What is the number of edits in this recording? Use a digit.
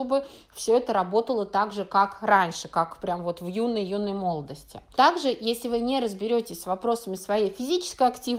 1